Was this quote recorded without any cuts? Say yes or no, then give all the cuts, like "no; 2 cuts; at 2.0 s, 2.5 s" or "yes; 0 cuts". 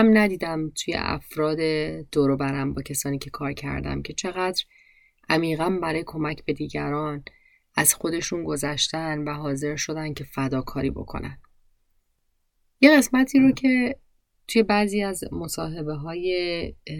yes; 0 cuts